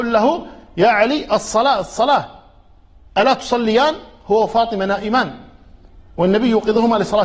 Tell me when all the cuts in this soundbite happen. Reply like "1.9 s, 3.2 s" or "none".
none